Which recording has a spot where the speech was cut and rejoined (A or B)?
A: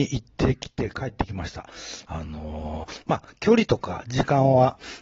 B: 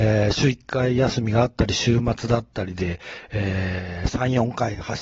A